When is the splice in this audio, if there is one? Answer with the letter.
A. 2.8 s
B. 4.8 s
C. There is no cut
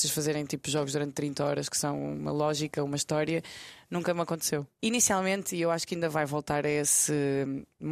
B